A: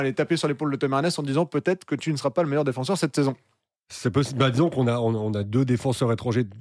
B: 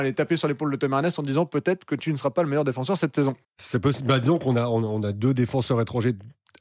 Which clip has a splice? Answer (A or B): B